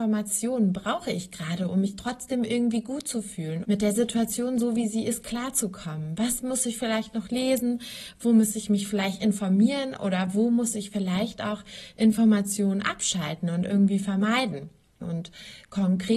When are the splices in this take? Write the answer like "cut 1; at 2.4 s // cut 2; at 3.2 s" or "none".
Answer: cut 1; at 3.6 s // cut 2; at 15.0 s